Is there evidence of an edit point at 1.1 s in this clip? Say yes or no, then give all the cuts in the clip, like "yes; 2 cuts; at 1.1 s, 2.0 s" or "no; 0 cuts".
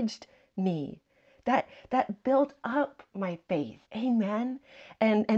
no; 1 cut; at 3.8 s